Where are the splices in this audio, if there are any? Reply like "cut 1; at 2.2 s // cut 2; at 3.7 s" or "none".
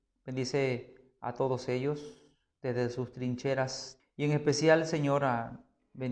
cut 1; at 4.0 s